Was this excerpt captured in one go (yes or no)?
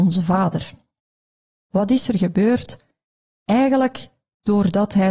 no